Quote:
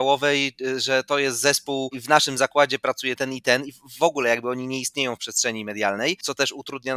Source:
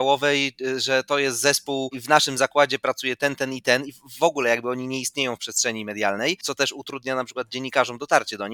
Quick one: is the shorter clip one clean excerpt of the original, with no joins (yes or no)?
no